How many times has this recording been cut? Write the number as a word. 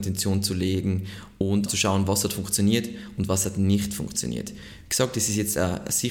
one